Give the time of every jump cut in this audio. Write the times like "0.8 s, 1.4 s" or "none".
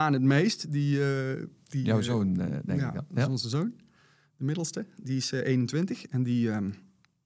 none